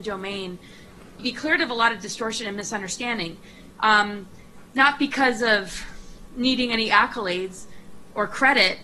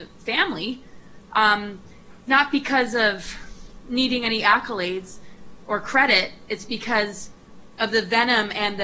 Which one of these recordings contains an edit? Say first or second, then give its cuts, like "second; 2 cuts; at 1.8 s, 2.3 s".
first; 2 cuts; at 1.2 s, 3.7 s